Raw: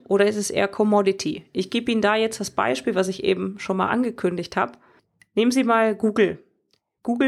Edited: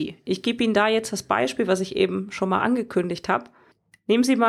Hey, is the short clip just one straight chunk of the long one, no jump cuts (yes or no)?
yes